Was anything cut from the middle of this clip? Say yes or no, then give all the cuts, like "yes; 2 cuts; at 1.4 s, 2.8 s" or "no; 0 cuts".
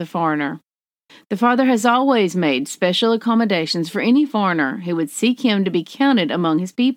no; 0 cuts